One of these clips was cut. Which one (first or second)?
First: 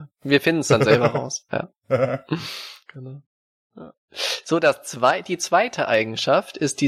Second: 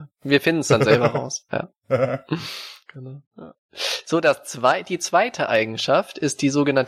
second